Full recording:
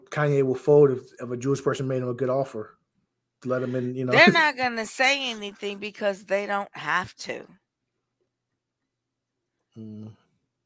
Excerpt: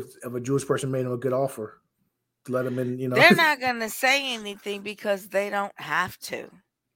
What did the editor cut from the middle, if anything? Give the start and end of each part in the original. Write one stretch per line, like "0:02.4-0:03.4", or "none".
none